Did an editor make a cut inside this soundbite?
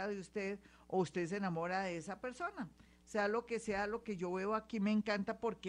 no; 0 cuts

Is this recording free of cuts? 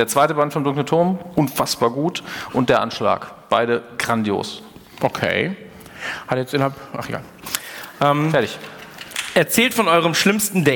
yes; 0 cuts

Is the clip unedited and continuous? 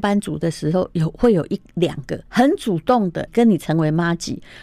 no; 2 cuts; at 2.3 s, 3.3 s

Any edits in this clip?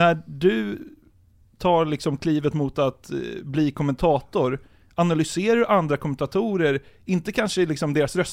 no; 0 cuts

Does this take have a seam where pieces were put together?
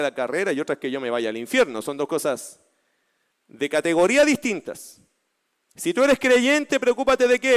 no; 0 cuts

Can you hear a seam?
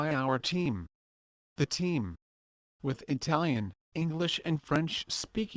yes; 1 cut; at 2.7 s

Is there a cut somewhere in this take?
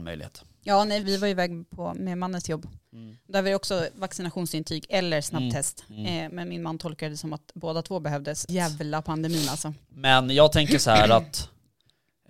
yes; 2 cuts; at 1.0 s, 8.5 s

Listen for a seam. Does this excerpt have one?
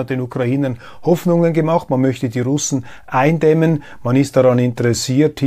no; 0 cuts

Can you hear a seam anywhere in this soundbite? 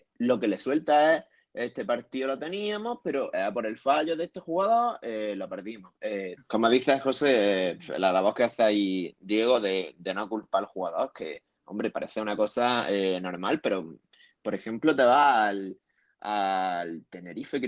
yes; 1 cut; at 6.4 s

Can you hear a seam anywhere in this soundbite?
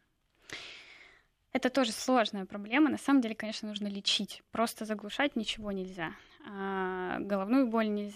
no; 0 cuts

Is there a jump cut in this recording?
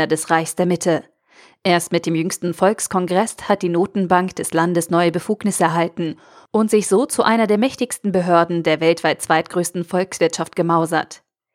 no; 0 cuts

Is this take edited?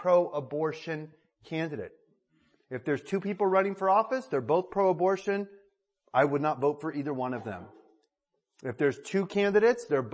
no; 0 cuts

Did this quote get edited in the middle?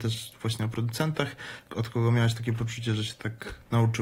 yes; 1 cut; at 1.7 s

